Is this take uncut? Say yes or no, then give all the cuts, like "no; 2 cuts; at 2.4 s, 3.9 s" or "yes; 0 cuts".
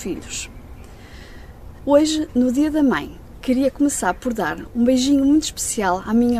no; 1 cut; at 1.8 s